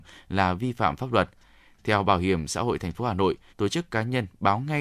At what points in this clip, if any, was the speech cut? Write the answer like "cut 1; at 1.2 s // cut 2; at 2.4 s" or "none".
cut 1; at 3.5 s